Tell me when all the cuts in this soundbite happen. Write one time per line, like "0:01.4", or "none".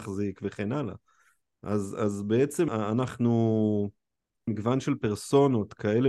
0:02.7
0:04.5